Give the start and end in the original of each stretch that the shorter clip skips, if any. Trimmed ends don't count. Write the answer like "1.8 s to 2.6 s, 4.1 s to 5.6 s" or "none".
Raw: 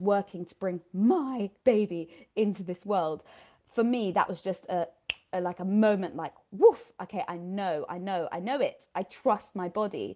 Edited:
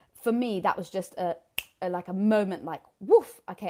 none